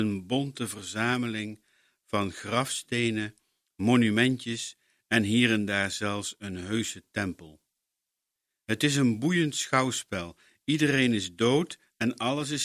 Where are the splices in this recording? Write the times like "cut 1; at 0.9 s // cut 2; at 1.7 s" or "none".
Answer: none